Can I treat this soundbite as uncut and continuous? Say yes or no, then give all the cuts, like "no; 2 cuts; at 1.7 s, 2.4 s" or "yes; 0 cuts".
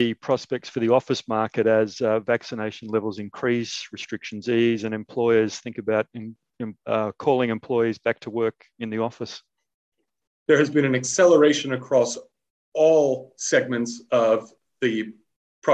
no; 1 cut; at 10.3 s